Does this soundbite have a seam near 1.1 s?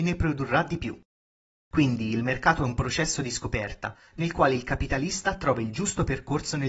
no; 0 cuts

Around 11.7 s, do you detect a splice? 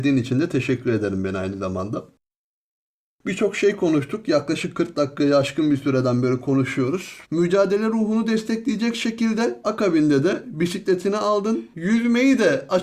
yes; 2 cuts; at 7.2 s, 11.7 s

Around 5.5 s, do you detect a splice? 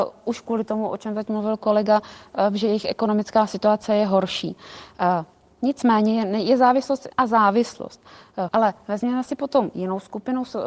no; 2 cuts; at 7.1 s, 8.5 s

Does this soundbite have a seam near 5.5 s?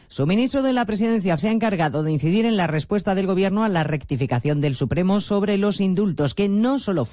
no; 1 cut; at 1.4 s

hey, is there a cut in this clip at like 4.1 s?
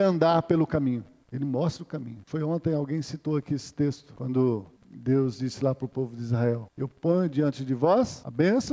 yes; 1 cut; at 4.1 s

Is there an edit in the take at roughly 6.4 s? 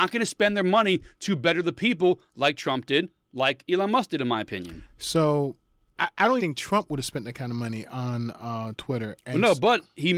yes; 1 cut; at 6.4 s

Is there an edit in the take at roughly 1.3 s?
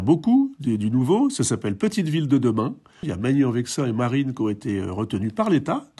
no; 1 cut; at 3.0 s

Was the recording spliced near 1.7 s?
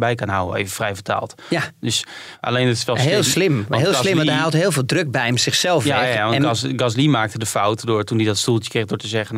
no; 0 cuts

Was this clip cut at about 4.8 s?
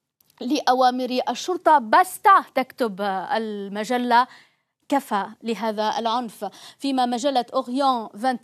yes; 1 cut; at 4.8 s

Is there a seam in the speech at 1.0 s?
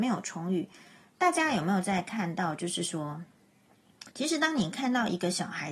no; 1 cut; at 4.1 s

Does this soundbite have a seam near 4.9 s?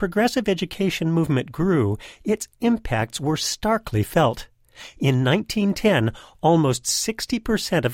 no; 0 cuts

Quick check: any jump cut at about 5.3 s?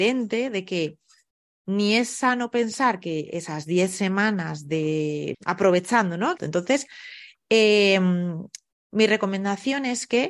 yes; 2 cuts; at 5.3 s, 6.4 s

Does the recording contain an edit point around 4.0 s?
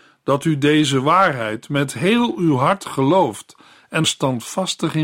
yes; 1 cut; at 4.0 s

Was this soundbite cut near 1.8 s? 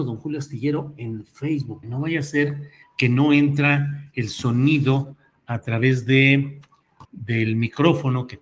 yes; 2 cuts; at 1.8 s, 7.1 s

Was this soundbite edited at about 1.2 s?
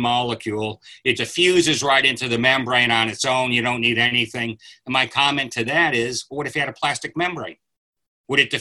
yes; 1 cut; at 1.2 s

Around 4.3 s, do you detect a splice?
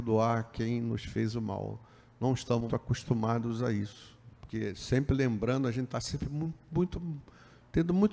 yes; 2 cuts; at 2.7 s, 4.3 s

